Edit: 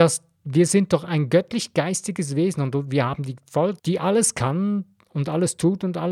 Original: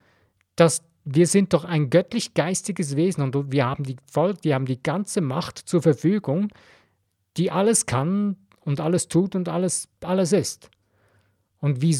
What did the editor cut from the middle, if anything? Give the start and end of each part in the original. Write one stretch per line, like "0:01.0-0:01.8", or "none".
0:04.4-0:07.3